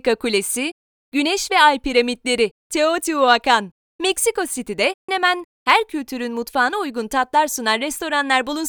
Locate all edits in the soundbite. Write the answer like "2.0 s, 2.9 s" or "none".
3.9 s, 5.1 s